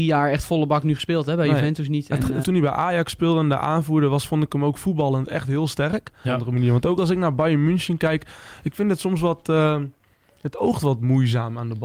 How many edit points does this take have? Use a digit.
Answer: 2